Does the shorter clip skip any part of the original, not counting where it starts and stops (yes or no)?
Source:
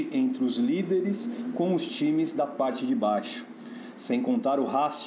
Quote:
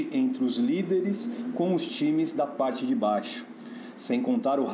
no